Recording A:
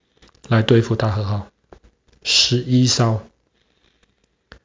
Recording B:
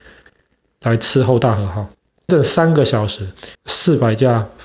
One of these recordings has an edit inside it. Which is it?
B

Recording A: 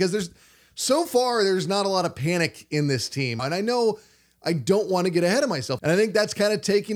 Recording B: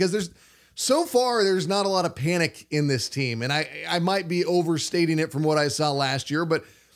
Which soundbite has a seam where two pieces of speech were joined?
A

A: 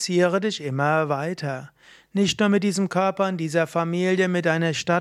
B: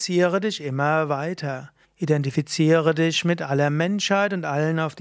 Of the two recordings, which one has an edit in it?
B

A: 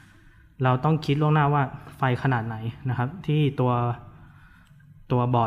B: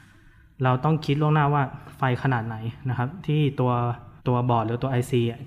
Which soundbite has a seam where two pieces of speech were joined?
B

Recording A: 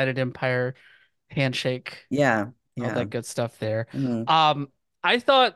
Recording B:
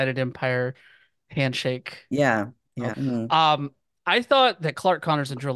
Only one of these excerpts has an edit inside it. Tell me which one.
B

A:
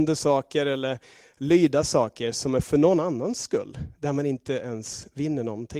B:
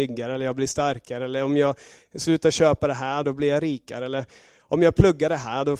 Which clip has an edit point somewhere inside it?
B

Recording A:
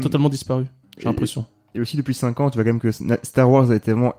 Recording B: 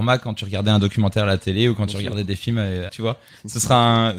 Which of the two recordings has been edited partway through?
B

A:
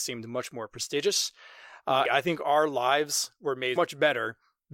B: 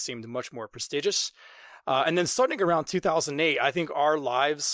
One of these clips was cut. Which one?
A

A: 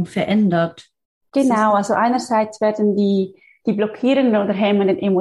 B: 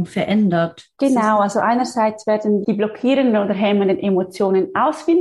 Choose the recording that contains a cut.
B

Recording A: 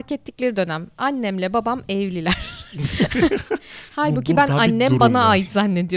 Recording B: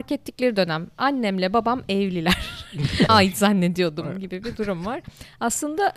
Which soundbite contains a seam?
B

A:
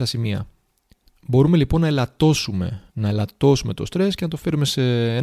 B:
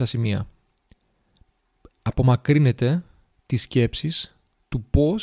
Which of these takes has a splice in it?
A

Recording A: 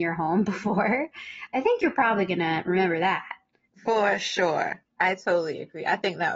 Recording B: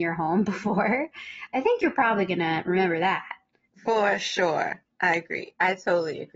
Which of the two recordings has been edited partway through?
A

